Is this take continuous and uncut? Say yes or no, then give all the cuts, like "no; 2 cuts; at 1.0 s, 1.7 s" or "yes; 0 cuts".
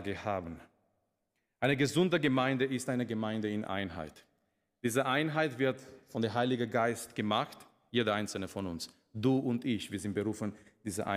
no; 1 cut; at 7.9 s